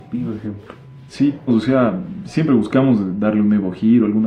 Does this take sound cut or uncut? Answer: cut